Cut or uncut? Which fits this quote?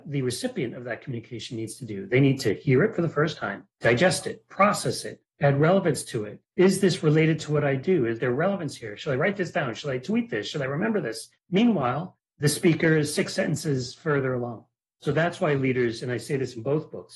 uncut